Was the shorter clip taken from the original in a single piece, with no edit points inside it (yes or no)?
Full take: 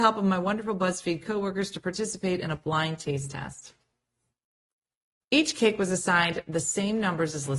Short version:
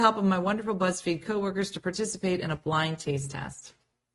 yes